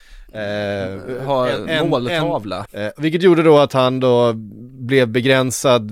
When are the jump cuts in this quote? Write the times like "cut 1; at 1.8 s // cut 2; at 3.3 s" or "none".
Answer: cut 1; at 2.7 s